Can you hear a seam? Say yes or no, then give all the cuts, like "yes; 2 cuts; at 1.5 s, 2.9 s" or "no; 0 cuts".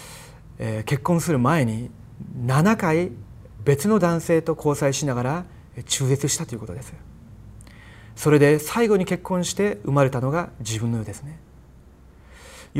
yes; 1 cut; at 3.6 s